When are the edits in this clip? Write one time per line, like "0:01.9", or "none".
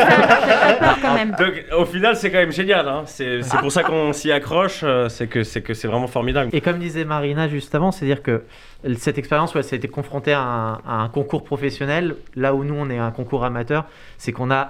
0:06.5